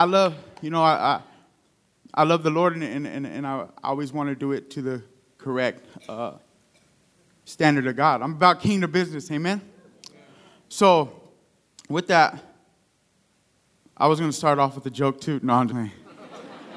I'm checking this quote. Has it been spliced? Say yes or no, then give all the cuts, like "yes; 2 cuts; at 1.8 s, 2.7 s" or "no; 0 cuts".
yes; 1 cut; at 15.7 s